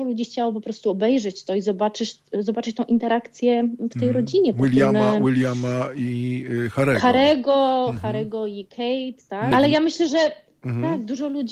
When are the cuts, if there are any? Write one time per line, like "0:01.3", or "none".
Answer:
0:09.5